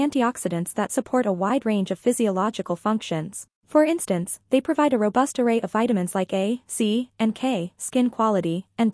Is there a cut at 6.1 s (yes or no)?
no